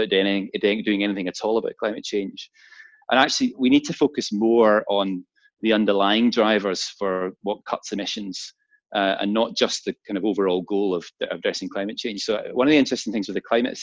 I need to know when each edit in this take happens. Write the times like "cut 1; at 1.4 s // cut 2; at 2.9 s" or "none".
cut 1; at 3.0 s